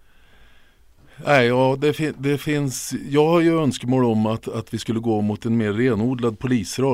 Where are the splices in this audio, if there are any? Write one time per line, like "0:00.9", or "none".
none